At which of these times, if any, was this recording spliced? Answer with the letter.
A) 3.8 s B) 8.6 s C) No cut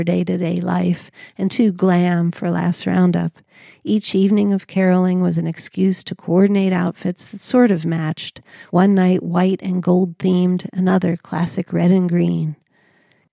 C